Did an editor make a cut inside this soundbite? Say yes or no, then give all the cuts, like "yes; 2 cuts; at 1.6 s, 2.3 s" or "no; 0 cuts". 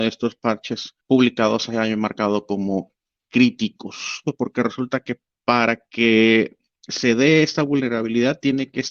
yes; 2 cuts; at 1.0 s, 4.2 s